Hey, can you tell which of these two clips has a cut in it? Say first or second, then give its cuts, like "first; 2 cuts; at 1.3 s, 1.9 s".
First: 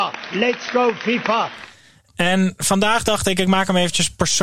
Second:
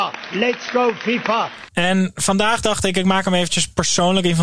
second; 1 cut; at 1.7 s